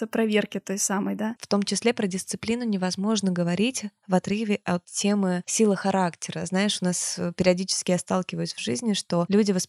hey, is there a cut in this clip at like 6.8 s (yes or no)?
no